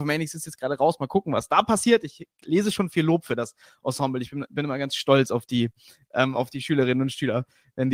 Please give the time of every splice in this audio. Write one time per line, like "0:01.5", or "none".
none

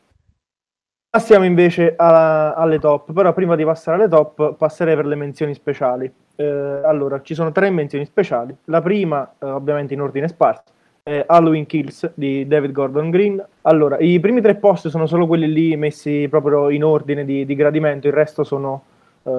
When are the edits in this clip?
0:13.5

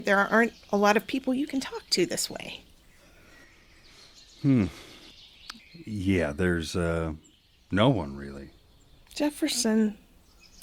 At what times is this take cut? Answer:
0:05.6
0:09.1

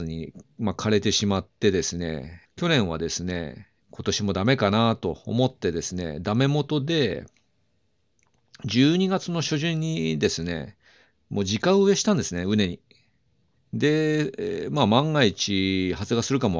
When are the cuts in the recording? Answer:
none

